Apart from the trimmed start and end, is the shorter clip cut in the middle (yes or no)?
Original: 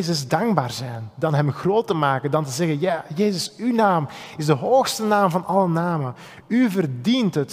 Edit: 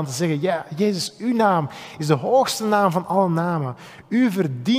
no